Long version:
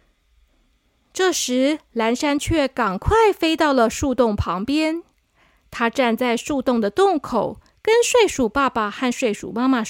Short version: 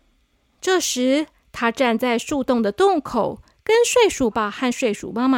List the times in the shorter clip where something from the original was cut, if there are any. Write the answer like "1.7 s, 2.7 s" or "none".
1.3 s, 4.3 s